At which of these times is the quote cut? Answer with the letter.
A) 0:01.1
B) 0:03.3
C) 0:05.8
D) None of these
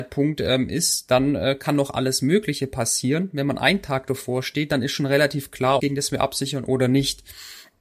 C